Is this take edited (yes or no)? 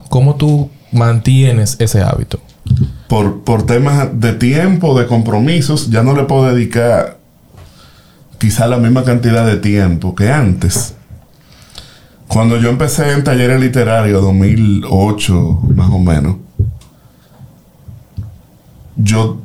yes